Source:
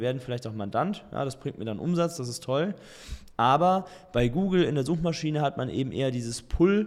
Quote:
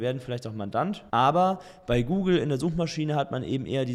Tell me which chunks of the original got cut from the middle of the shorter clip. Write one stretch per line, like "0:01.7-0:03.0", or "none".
0:01.1-0:03.4